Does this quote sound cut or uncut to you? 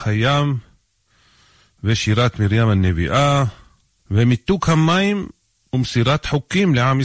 uncut